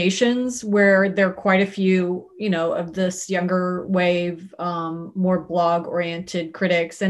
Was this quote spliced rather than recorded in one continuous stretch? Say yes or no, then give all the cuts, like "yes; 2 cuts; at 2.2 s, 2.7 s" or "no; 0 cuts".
no; 0 cuts